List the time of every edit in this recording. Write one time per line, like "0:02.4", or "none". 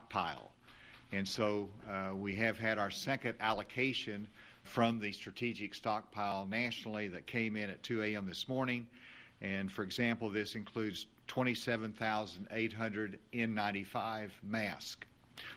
0:04.6